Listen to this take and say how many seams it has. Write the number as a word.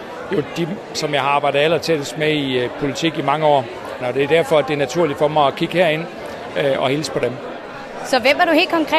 two